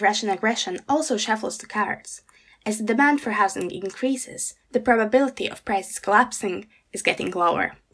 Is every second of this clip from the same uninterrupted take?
yes; 0 cuts

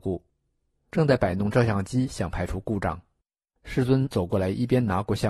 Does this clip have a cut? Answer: no; 0 cuts

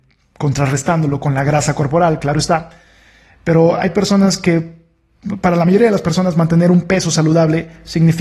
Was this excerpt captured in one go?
no; 1 cut; at 2.2 s

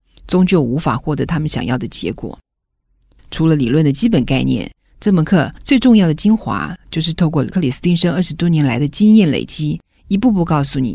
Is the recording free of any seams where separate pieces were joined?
no; 1 cut; at 3.2 s

